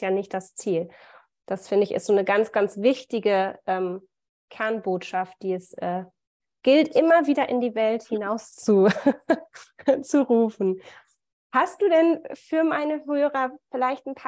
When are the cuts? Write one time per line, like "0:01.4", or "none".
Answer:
none